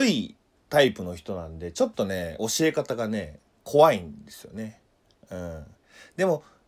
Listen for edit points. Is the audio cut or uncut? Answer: uncut